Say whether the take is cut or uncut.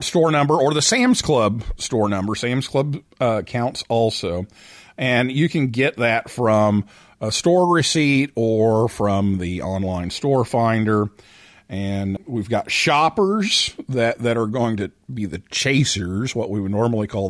cut